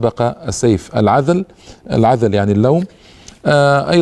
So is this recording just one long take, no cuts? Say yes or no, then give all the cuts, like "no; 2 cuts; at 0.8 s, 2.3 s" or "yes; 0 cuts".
yes; 0 cuts